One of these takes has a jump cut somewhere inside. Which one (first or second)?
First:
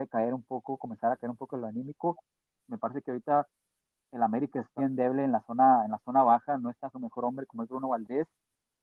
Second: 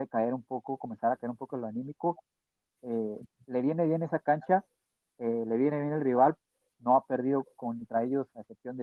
first